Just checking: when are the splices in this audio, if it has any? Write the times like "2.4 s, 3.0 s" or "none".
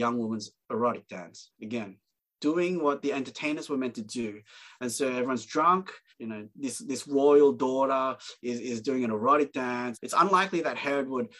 6.1 s, 9.9 s